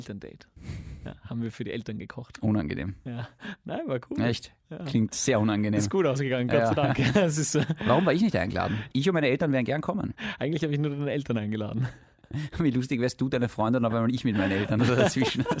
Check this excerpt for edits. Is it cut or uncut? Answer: uncut